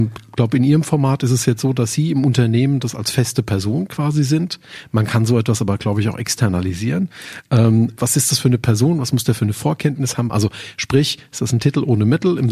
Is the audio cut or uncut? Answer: cut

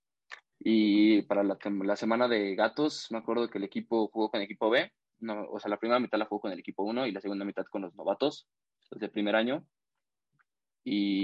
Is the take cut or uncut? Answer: uncut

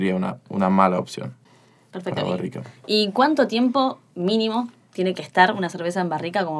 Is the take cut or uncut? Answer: uncut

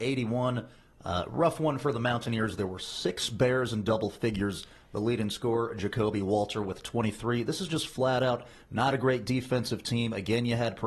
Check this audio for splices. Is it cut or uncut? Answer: uncut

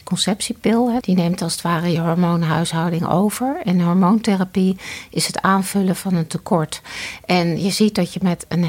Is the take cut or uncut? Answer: cut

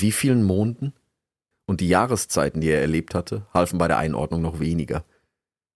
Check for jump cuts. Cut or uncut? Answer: cut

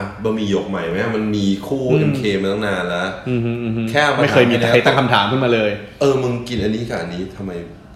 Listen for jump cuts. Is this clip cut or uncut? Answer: uncut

